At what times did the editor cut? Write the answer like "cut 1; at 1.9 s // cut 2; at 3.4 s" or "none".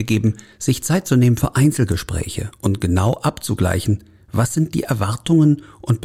none